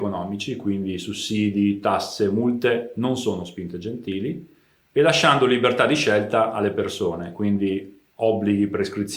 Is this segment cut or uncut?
uncut